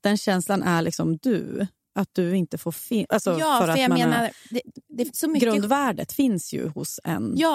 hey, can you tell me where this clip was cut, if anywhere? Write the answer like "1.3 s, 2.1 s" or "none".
3.1 s